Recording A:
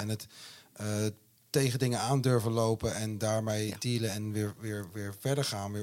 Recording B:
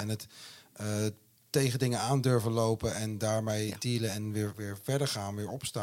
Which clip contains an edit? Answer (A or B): B